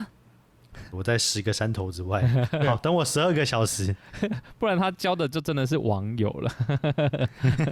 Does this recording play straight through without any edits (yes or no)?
no